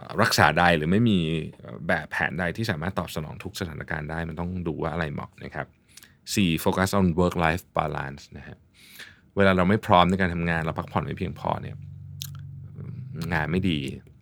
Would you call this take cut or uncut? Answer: uncut